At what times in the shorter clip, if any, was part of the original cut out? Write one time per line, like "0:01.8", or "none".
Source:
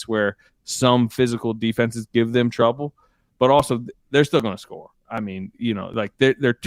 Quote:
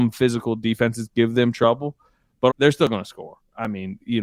0:02.5

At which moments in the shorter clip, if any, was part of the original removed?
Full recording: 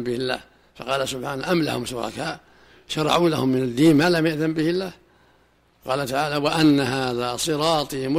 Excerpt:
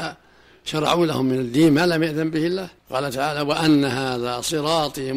0:02.8

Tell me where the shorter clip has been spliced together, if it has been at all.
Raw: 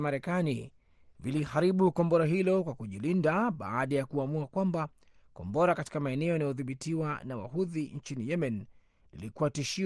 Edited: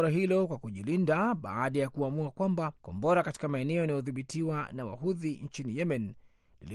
0:02.8

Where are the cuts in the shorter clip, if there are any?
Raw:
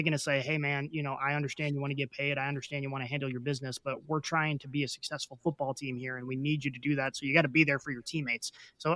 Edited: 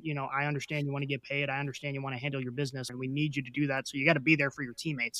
0:02.9

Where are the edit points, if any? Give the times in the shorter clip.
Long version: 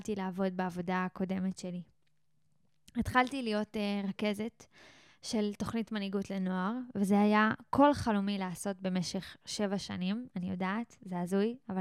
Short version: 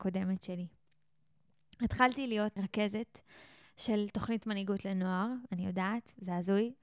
0:02.6
0:05.5

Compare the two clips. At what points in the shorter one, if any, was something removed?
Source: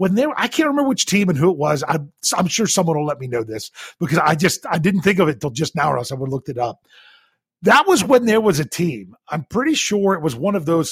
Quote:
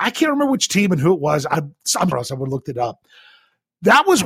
0:02.1

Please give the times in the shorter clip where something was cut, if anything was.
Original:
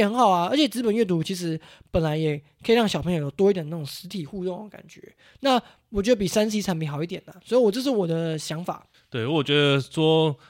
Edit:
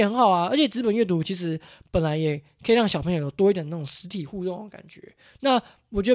none

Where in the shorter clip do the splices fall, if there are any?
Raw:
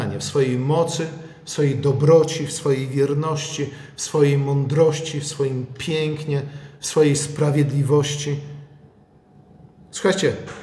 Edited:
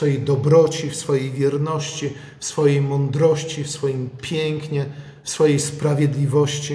none

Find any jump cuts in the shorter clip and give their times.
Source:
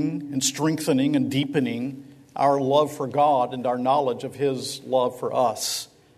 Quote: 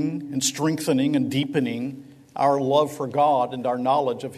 none

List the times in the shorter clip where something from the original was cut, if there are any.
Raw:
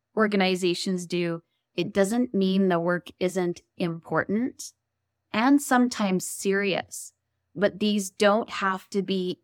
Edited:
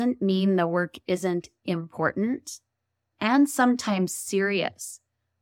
none

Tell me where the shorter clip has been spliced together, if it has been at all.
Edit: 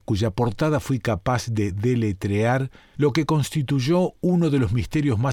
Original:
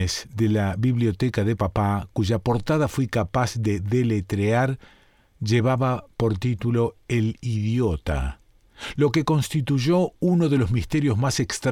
0:02.9

